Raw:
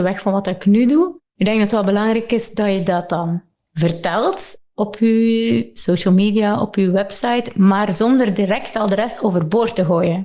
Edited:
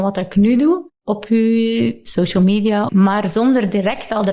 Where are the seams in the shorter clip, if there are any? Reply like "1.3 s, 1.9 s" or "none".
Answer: 0.9 s, 2.9 s